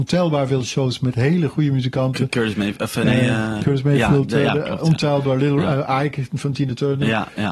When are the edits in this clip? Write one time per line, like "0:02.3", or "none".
0:03.6